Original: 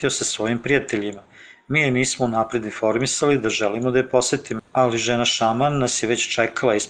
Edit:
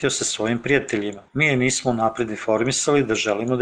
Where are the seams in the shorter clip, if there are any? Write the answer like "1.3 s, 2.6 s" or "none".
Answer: 1.3 s